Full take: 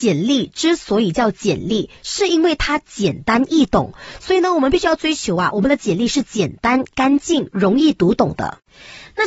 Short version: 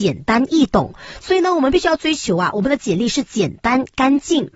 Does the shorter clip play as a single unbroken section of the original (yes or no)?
yes